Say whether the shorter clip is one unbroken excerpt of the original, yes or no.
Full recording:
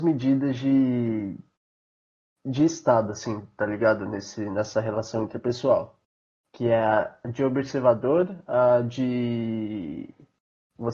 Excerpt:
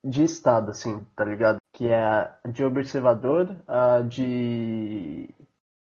no